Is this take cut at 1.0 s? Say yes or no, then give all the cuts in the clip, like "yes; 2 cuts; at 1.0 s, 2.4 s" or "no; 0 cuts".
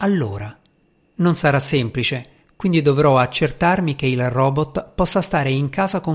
yes; 1 cut; at 1.0 s